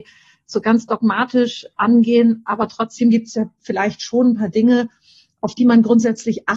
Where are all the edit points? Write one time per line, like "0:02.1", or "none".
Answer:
none

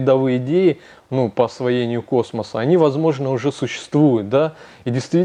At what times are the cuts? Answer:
none

